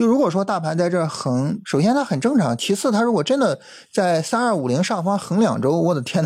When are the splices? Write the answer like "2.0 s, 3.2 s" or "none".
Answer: 1.6 s